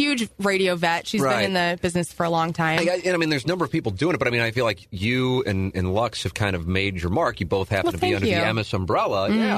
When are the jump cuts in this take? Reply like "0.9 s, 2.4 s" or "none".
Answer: none